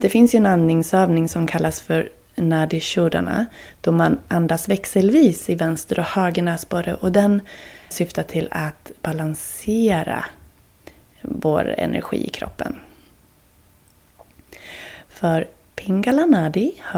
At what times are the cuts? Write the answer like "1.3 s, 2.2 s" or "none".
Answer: 7.9 s, 15.0 s